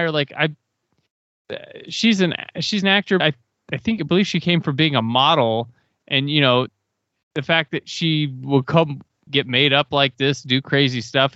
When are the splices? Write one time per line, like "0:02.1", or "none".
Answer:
0:03.2
0:09.3

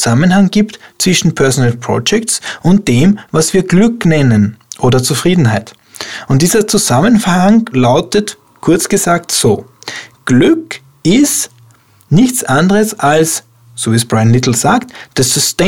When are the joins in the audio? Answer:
none

